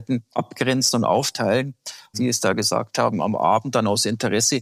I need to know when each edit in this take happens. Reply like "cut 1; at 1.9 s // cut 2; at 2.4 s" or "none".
cut 1; at 2.1 s